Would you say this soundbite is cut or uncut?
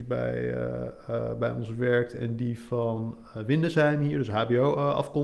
uncut